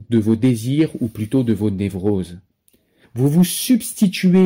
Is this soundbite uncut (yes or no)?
no